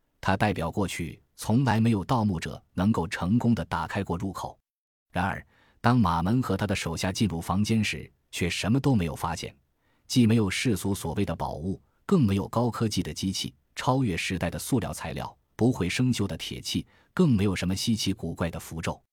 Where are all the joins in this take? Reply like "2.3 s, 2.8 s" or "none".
5.0 s